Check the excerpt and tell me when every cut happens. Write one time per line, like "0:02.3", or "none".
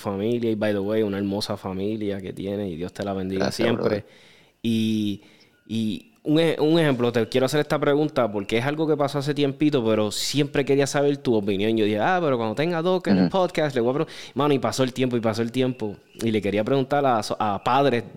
none